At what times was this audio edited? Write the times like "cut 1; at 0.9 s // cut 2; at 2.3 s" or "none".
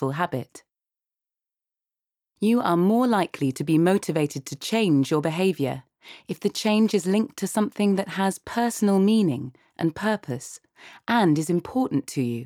none